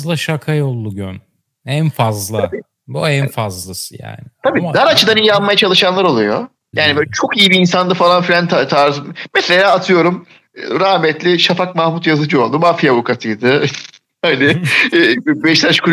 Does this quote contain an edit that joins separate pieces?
yes; 1 cut; at 6.7 s

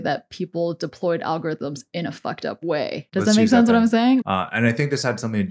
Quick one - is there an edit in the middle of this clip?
yes; 2 cuts; at 3.1 s, 4.2 s

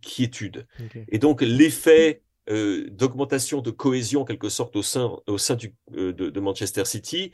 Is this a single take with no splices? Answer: yes; 0 cuts

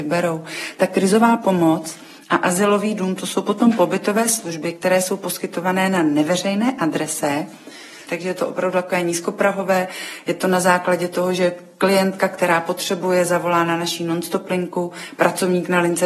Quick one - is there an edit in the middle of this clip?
yes; 1 cut; at 8.1 s

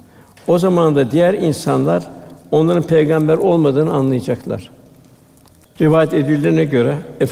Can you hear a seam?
yes; 1 cut; at 5.6 s

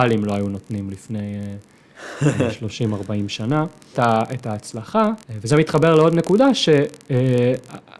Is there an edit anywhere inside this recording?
yes; 2 cuts; at 3.9 s, 5.2 s

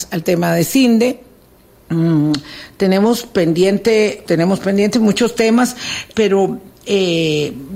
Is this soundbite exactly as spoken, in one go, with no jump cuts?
no; 2 cuts; at 4.2 s, 6.1 s

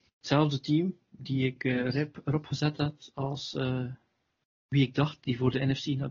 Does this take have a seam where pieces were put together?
no; 0 cuts

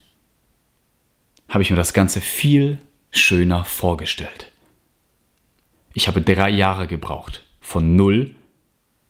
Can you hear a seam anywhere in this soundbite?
yes; 1 cut; at 5.7 s

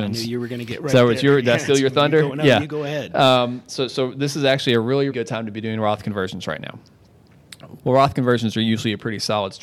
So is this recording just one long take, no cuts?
no; 2 cuts; at 5.1 s, 7.8 s

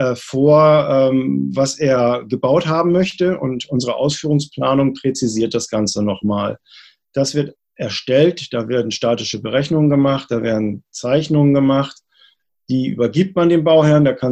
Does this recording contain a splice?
no; 0 cuts

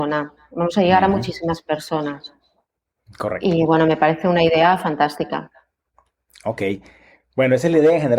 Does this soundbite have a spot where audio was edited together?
no; 0 cuts

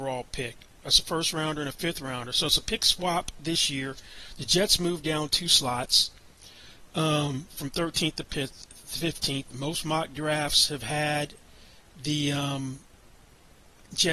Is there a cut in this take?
no; 0 cuts

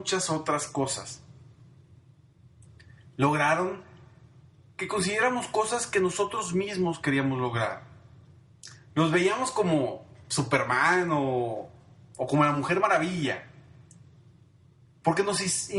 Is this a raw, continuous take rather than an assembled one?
no; 1 cut; at 8.8 s

